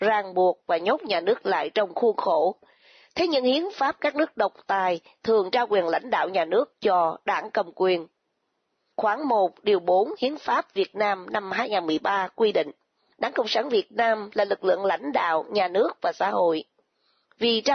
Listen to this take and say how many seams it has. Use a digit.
0